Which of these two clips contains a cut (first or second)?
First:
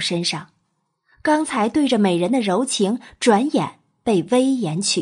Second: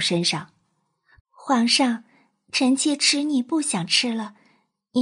second